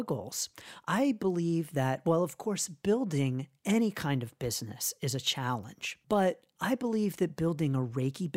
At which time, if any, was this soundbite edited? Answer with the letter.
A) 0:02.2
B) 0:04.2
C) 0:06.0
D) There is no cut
C